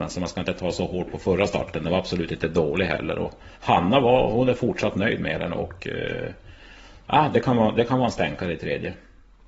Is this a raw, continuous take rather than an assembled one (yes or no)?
yes